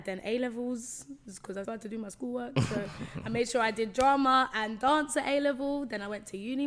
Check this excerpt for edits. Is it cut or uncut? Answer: cut